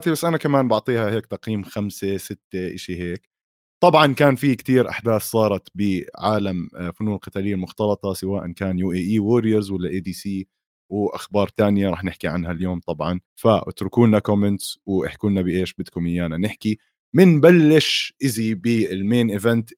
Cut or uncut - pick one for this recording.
cut